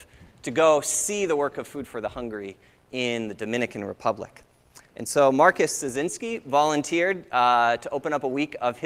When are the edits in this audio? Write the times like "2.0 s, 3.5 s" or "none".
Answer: none